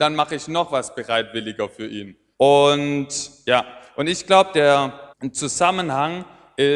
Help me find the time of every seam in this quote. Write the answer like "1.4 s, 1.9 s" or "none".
2.3 s, 5.1 s